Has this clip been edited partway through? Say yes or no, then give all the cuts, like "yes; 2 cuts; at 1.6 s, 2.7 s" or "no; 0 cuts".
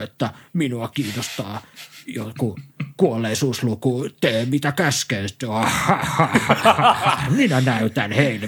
no; 0 cuts